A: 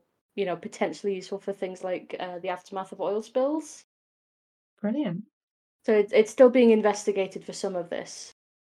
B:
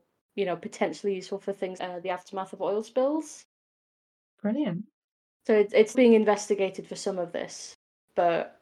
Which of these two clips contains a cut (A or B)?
B